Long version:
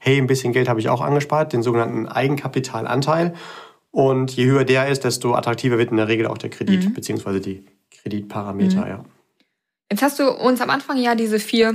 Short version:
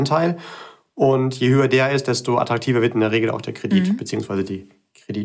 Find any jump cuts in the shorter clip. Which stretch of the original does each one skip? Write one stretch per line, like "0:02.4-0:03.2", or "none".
none